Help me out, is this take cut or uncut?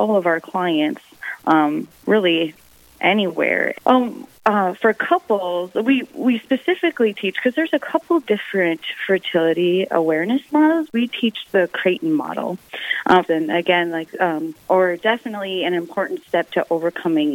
cut